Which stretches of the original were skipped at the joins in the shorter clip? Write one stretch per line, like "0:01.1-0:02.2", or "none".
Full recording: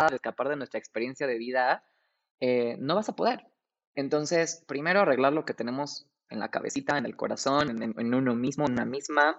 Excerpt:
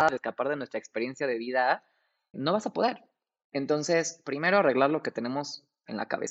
0:02.3-0:02.8

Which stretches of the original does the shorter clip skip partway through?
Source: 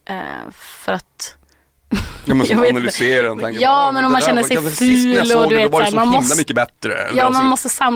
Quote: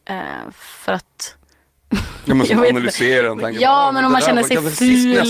none

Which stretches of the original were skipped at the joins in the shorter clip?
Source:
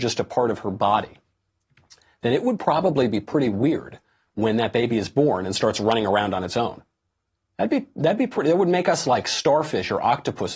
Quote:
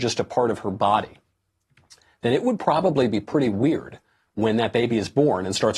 none

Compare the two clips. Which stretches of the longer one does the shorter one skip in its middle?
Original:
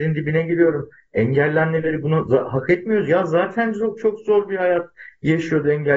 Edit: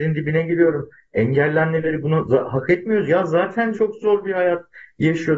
0:03.7-0:04.0

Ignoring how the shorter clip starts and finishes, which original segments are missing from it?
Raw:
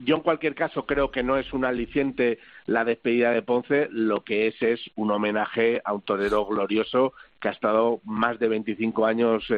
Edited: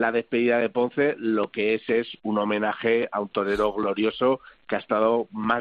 none

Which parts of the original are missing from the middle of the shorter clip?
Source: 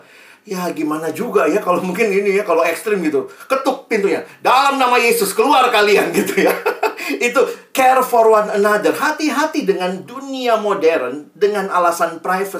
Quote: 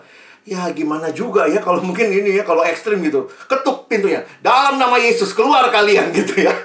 none

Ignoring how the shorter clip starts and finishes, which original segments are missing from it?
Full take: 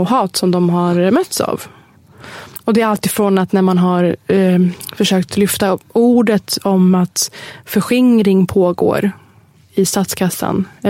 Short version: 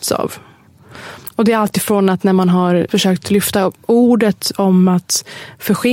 0:04.2-0:05.0

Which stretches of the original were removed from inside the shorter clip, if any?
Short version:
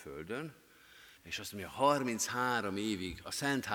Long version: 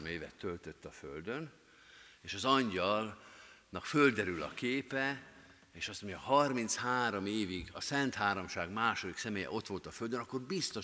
0:02.1-0:05.7

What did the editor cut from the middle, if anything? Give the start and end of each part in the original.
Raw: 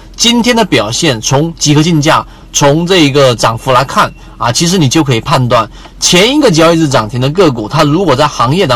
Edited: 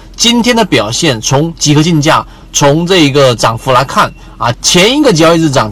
0:04.5-0:05.9

